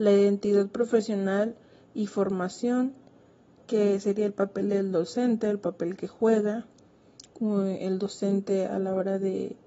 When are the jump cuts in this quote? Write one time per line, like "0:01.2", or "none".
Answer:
none